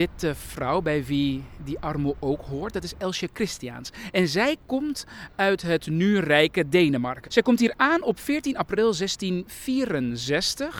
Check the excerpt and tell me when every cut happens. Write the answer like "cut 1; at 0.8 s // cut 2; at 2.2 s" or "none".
cut 1; at 7.2 s